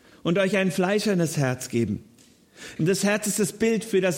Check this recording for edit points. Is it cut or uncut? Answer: cut